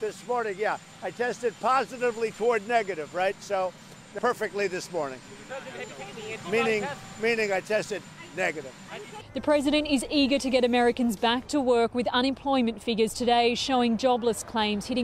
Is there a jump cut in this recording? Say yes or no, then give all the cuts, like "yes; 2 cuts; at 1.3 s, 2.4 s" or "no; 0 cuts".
yes; 1 cut; at 4.2 s